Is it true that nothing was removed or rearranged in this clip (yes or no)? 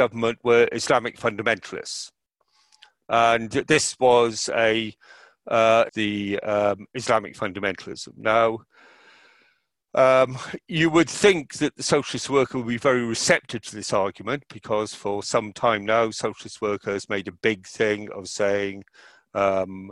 no